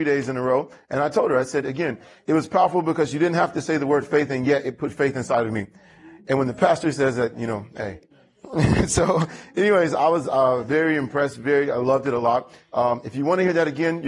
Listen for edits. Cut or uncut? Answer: uncut